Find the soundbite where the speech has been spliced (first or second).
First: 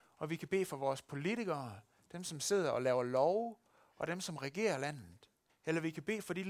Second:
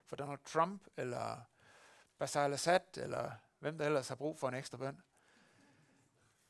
first